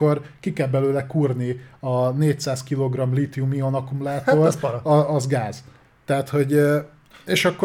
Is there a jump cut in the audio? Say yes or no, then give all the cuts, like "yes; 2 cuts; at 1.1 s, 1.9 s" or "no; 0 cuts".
no; 0 cuts